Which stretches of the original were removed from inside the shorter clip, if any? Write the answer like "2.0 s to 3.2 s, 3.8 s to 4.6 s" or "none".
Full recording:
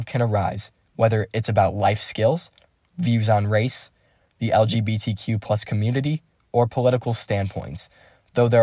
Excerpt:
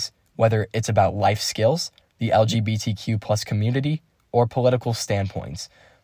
2.6 s to 4.2 s